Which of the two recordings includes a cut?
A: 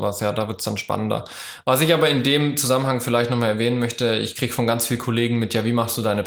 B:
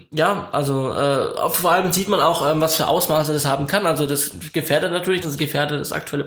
B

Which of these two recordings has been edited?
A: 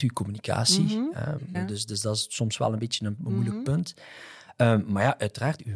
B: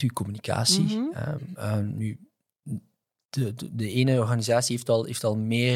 A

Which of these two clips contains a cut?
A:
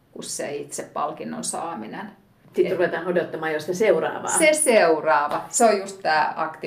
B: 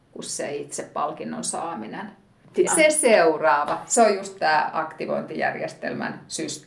B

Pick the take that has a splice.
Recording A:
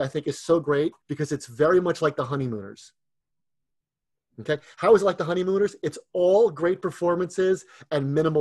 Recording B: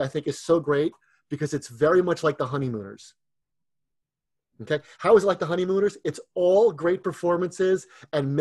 A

